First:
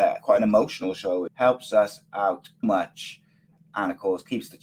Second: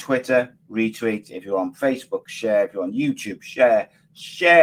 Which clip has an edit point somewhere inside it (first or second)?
first